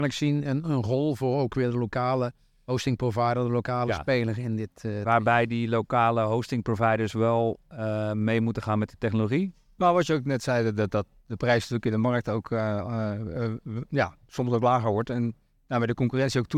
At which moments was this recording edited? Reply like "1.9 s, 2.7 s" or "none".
9.8 s